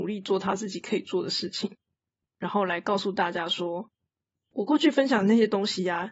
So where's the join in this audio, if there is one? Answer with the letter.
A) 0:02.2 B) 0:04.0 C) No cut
A